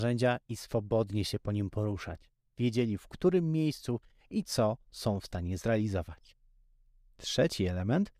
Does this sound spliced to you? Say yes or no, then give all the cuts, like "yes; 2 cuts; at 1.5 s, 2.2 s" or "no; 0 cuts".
no; 0 cuts